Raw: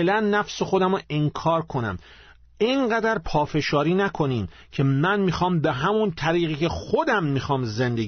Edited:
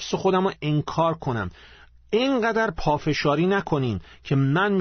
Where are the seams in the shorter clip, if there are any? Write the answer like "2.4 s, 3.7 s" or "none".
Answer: none